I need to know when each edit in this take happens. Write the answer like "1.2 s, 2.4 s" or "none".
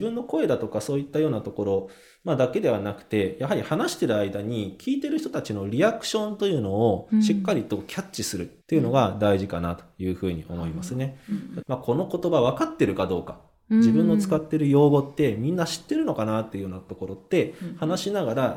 8.6 s, 11.6 s